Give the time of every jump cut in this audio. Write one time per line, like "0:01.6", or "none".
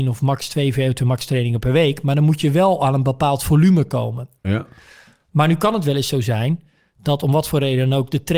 0:04.4